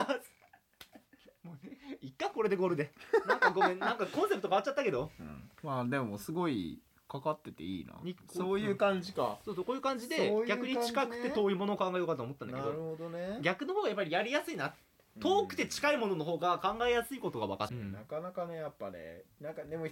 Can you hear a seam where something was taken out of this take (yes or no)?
yes